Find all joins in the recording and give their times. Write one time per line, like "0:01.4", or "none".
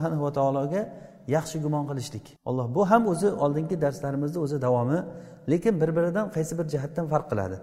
0:02.4